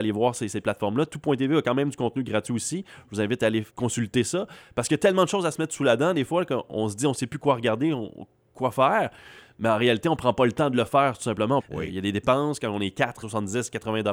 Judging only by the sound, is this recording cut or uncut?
cut